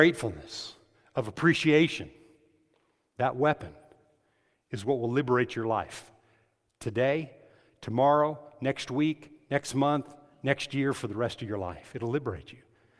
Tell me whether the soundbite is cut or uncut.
uncut